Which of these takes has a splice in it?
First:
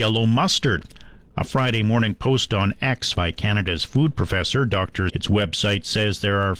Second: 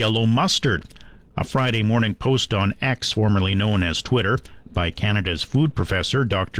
first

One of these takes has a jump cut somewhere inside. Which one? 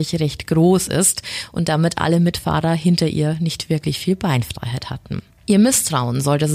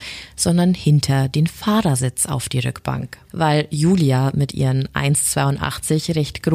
second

